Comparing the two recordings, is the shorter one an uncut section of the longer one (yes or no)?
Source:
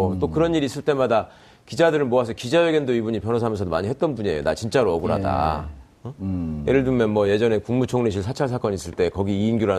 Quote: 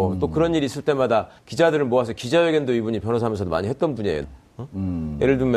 no